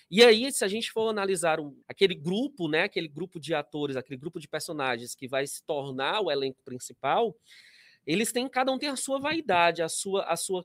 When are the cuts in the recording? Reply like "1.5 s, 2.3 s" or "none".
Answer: 1.8 s